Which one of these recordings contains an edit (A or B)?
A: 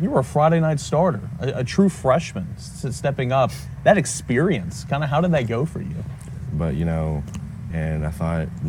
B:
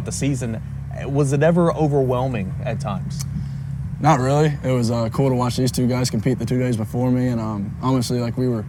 A